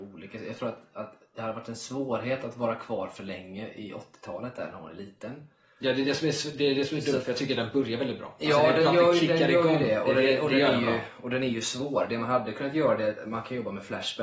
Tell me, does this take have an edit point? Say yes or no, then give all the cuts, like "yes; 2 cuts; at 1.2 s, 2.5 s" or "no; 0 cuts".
no; 0 cuts